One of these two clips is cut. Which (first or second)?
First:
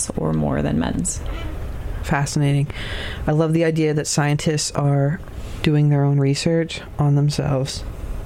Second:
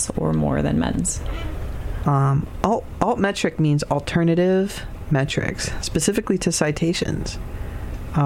second